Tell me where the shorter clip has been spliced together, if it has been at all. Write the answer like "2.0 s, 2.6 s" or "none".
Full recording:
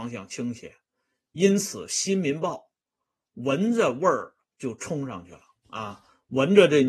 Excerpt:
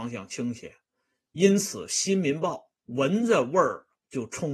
2.8 s